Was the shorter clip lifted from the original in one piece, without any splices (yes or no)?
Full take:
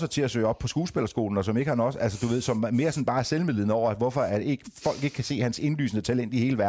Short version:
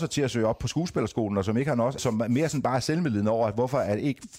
no